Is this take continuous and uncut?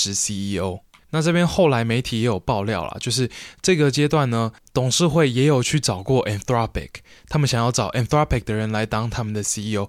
yes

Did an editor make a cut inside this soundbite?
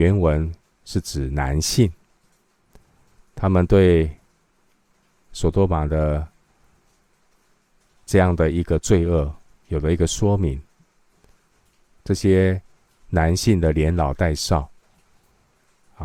yes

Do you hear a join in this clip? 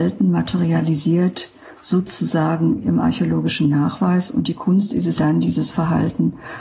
yes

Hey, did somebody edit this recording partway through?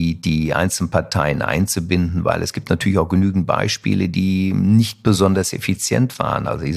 no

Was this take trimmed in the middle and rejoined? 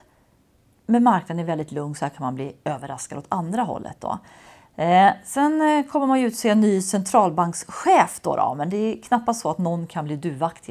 no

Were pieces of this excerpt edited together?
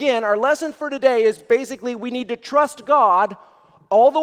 no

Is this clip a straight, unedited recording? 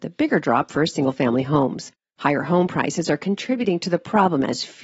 no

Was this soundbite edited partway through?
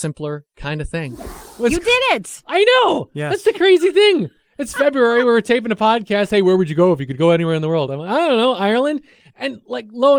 no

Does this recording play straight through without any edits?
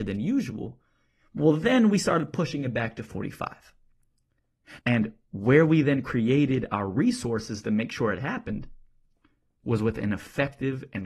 no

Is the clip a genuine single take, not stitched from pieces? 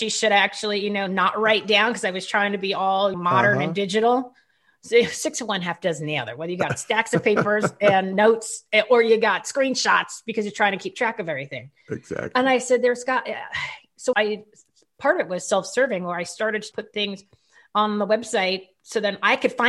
no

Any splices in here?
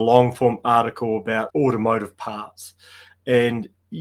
yes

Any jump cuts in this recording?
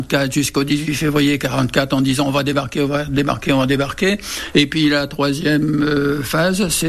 yes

